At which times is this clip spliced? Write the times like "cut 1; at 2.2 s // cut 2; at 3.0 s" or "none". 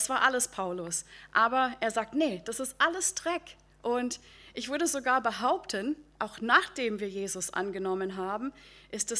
none

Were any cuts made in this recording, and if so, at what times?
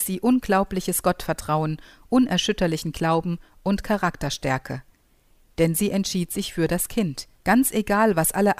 cut 1; at 7.4 s

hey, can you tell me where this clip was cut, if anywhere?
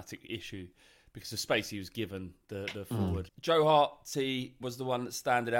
cut 1; at 3.3 s // cut 2; at 4.6 s

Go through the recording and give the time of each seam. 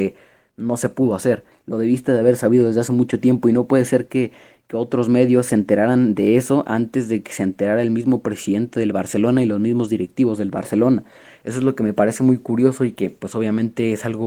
cut 1; at 1.5 s

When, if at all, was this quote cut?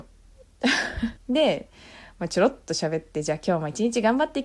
cut 1; at 1.2 s

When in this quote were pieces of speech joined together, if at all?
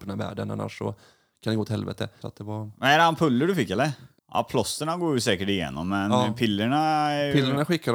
cut 1; at 2.2 s // cut 2; at 4.2 s

